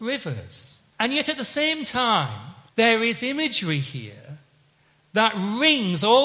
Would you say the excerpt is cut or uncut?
cut